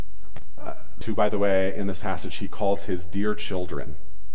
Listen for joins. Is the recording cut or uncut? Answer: cut